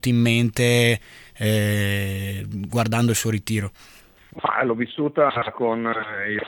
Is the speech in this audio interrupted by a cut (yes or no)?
no